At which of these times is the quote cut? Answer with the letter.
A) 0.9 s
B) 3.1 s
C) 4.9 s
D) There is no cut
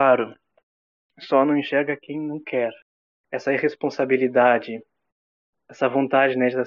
B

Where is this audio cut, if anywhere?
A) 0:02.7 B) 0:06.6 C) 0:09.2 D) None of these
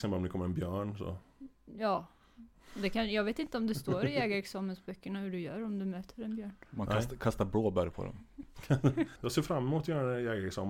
C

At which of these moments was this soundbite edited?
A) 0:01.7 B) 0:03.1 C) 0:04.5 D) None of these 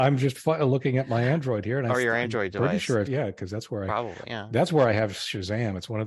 B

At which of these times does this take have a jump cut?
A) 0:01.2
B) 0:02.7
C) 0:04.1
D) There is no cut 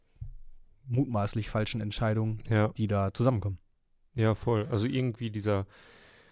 D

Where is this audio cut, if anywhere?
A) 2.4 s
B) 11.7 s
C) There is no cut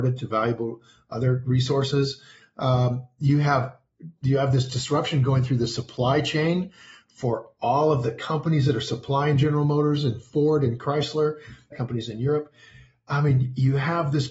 B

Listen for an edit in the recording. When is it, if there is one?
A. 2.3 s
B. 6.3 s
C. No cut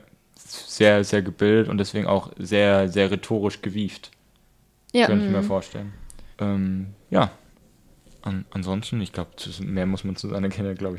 B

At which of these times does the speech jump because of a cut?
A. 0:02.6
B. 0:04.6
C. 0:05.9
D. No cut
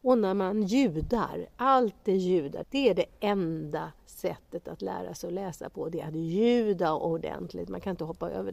A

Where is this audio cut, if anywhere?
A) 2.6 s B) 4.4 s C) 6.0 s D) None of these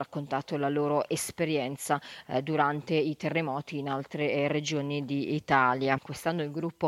C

